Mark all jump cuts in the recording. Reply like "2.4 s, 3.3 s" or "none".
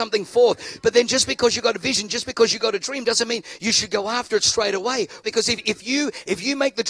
5.2 s